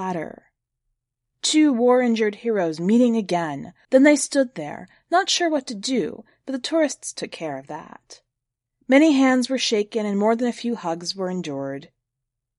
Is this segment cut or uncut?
cut